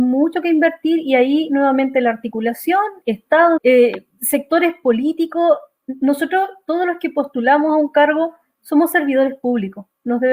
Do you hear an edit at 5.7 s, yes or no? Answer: no